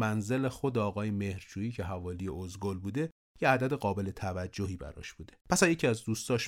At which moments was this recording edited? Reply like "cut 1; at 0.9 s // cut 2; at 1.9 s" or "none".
cut 1; at 5.4 s